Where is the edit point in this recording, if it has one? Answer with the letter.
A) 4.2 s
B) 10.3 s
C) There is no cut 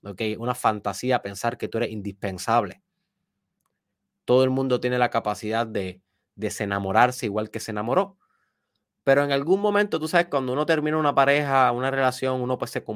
C